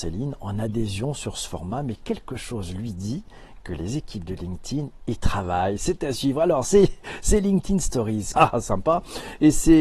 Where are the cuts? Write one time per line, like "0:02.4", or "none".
0:08.3